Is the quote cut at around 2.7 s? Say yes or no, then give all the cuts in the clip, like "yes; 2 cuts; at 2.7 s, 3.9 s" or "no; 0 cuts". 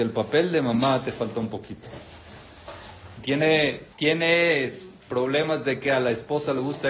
no; 1 cut; at 3.9 s